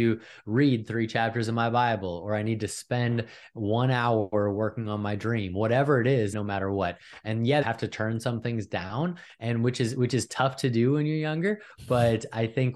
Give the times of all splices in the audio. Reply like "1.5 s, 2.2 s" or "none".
6.3 s, 7.6 s